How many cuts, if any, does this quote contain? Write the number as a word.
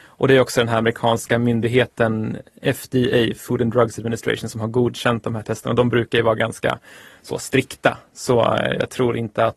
zero